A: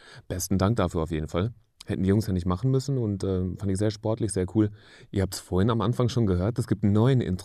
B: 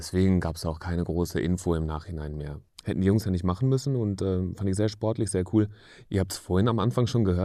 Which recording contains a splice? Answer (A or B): B